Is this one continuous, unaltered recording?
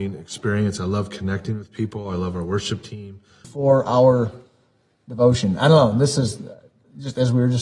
no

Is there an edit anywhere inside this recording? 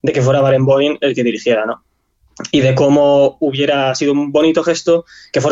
no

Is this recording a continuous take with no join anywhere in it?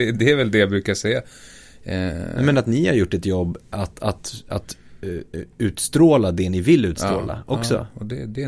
yes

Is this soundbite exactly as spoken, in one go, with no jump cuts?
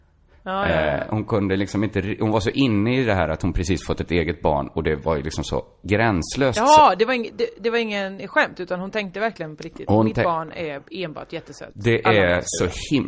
yes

